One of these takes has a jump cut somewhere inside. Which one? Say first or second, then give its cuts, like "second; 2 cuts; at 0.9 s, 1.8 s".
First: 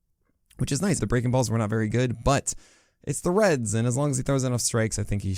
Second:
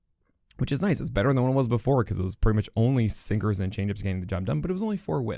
first; 1 cut; at 1.0 s